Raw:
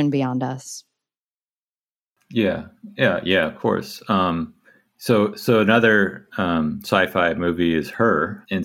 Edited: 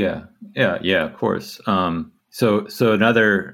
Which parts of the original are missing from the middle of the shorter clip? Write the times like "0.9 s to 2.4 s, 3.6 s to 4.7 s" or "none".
4.6 s to 4.9 s

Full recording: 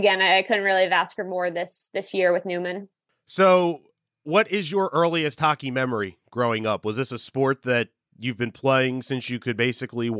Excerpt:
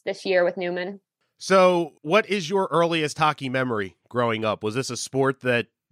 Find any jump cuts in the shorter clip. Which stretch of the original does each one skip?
3.9 s to 4.2 s

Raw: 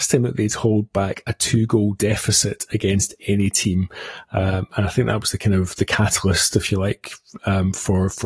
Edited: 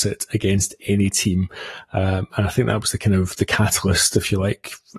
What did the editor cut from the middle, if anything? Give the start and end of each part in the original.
none

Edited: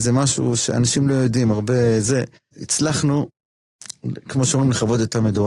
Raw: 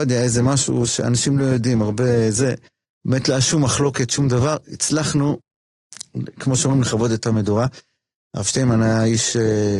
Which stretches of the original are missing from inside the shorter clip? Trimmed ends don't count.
2.8 s to 4.6 s

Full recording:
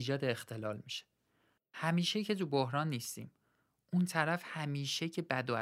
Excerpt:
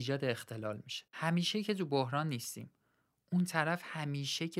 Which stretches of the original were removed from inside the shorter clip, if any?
1.1 s to 1.7 s

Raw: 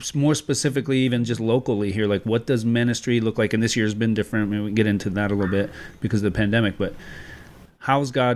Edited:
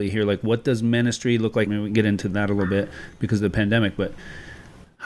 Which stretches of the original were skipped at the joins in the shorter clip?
3.5 s to 4.5 s

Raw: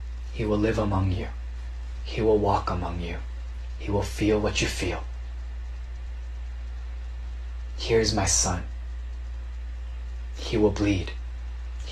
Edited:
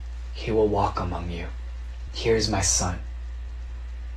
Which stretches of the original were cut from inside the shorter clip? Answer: 3.8 s to 7.7 s

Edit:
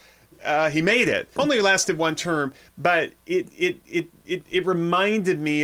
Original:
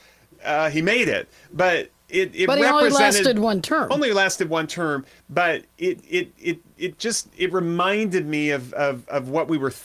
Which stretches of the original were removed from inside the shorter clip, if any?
1.4 s to 3.9 s, 7.0 s to 7.3 s

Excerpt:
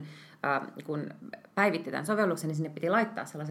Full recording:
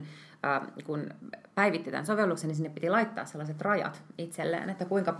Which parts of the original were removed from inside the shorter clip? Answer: none

